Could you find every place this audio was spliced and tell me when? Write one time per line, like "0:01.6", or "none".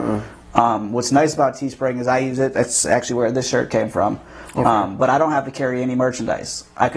none

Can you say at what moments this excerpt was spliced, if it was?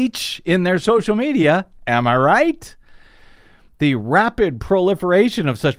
none

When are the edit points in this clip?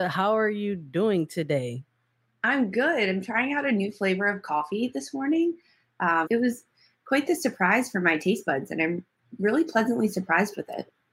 0:06.3

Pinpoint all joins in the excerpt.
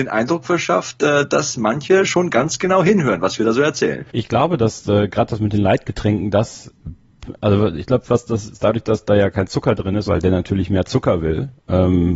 0:04.1
0:08.5
0:10.1

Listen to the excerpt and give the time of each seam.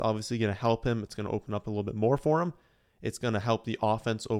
0:01.0

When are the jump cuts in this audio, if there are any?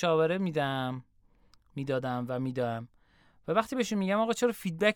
none

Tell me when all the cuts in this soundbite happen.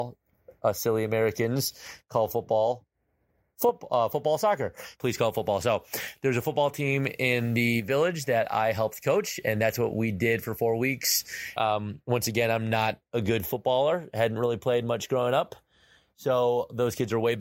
0:05.0
0:11.6

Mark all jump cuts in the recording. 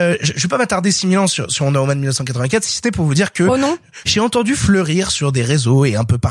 0:04.0

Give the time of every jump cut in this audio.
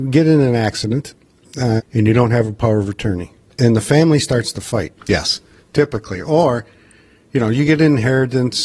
0:01.8
0:05.0

